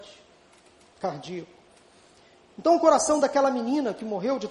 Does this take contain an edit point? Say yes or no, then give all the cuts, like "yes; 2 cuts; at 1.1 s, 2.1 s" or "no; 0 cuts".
no; 0 cuts